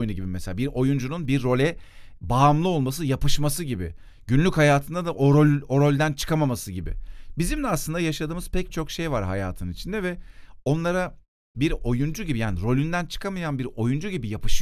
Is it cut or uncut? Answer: uncut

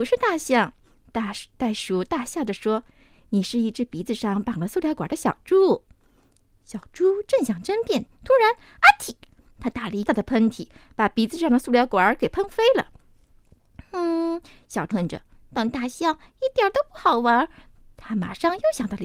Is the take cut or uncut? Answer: cut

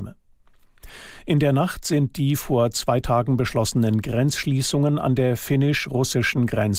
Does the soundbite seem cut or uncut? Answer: uncut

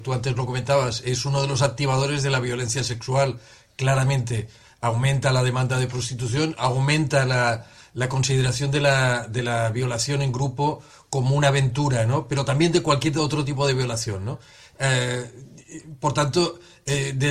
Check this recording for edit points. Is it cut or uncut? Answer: uncut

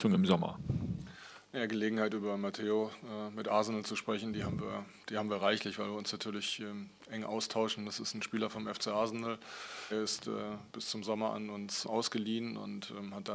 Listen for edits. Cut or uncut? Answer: cut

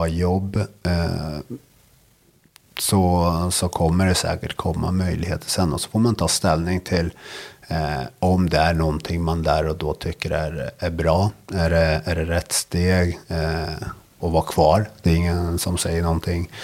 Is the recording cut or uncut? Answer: cut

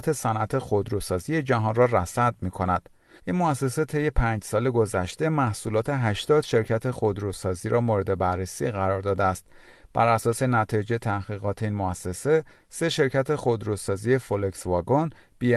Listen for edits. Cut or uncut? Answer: cut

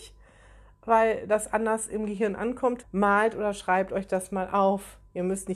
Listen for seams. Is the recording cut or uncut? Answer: cut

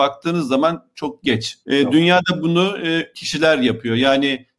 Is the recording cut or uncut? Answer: cut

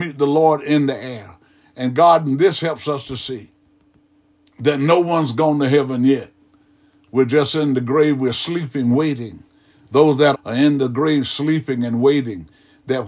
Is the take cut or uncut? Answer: cut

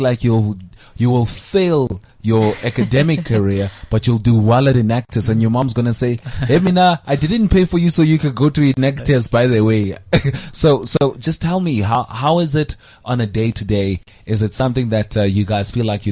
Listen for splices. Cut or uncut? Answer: uncut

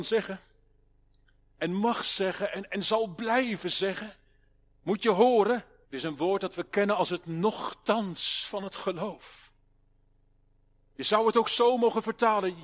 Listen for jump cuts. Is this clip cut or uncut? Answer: cut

